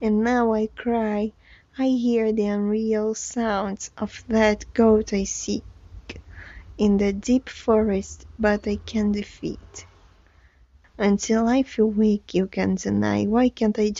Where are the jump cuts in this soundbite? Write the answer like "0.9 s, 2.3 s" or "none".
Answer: 10.8 s